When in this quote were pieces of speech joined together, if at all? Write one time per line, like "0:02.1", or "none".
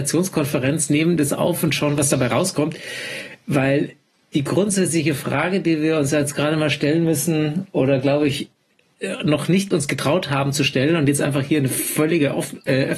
none